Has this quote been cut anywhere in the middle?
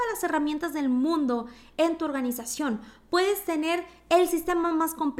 no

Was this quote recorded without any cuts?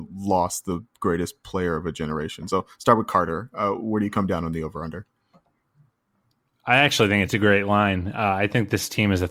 yes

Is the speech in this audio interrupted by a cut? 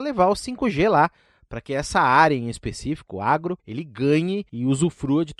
no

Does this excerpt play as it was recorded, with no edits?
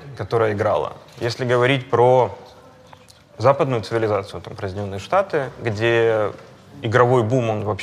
yes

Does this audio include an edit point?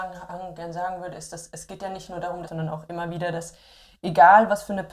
yes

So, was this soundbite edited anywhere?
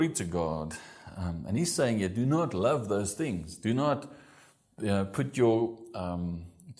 no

